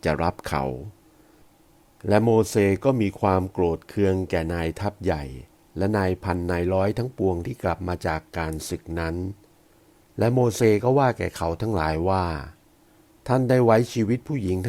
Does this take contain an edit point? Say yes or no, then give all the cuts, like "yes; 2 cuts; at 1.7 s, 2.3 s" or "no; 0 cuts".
no; 0 cuts